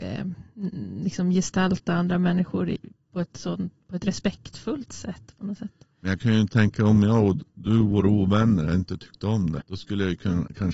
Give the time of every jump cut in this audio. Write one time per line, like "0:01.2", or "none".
0:09.6